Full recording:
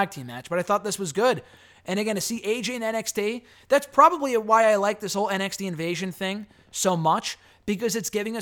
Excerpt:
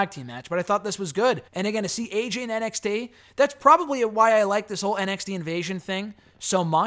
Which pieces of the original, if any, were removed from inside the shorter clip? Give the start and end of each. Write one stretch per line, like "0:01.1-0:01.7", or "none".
0:01.5-0:01.8